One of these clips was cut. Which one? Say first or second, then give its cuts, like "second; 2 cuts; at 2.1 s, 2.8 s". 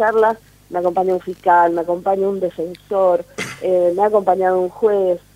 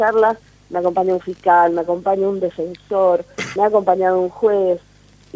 second; 1 cut; at 3.6 s